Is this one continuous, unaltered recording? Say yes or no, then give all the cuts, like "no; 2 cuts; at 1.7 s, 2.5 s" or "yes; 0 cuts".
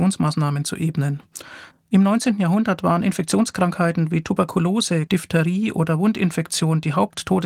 no; 2 cuts; at 1.7 s, 5.1 s